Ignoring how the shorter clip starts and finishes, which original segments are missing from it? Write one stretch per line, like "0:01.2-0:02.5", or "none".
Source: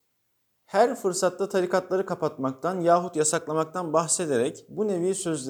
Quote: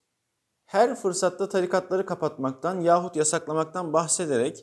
none